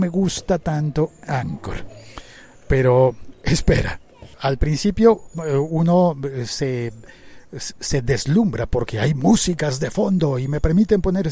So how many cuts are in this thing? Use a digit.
1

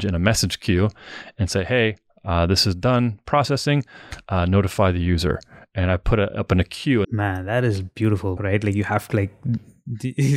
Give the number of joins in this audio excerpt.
2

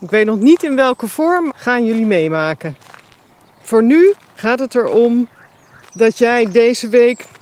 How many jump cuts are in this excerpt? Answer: 2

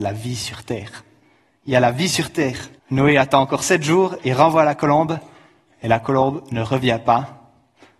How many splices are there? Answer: 1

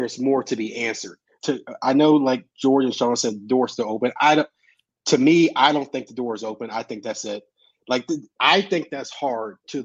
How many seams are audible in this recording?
1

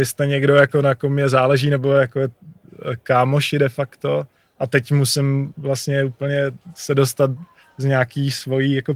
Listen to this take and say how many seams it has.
0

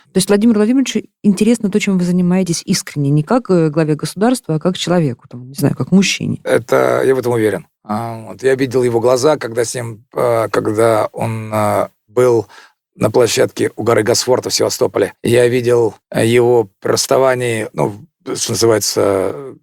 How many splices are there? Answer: 0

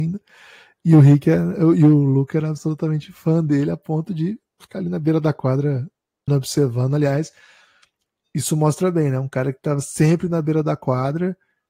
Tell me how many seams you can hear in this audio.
1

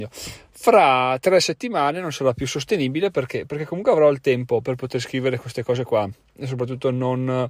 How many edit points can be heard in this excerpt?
1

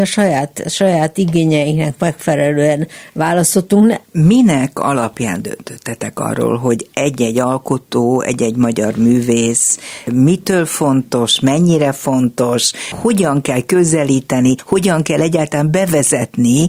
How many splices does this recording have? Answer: 1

